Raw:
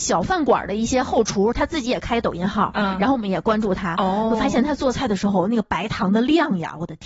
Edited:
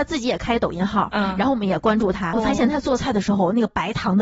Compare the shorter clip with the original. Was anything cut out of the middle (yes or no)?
yes